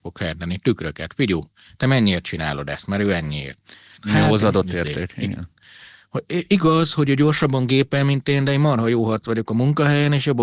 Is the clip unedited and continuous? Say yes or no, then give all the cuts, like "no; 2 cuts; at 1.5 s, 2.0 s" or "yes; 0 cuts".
no; 1 cut; at 4.0 s